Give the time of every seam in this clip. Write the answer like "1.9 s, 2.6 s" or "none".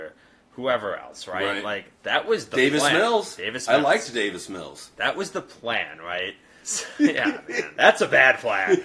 6.6 s, 7.7 s